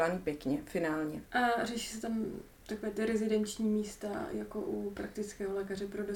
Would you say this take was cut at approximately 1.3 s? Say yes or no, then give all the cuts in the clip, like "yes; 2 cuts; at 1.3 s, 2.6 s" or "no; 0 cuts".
yes; 1 cut; at 1.3 s